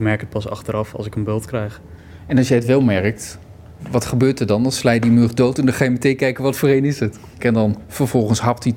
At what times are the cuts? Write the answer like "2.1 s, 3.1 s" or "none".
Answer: 7.4 s